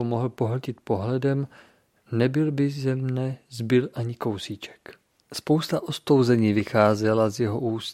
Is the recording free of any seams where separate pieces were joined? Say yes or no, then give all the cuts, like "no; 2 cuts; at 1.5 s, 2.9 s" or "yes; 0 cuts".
no; 1 cut; at 5.2 s